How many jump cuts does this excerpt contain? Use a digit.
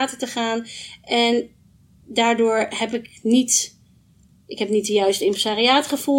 0